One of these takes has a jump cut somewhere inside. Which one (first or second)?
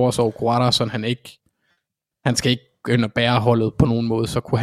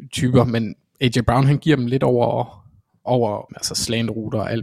second